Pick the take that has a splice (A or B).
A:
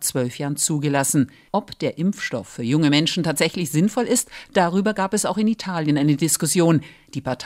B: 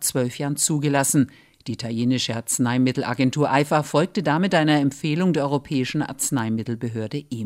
A